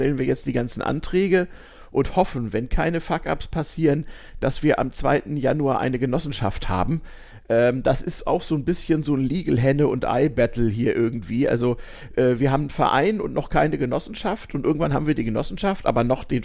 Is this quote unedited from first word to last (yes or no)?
yes